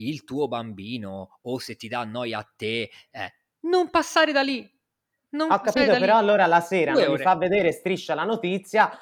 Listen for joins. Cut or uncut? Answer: uncut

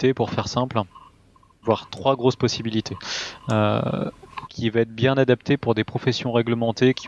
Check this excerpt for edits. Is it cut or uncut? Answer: cut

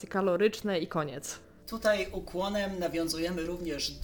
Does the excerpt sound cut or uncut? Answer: uncut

